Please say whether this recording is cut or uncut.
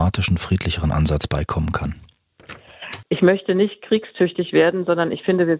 cut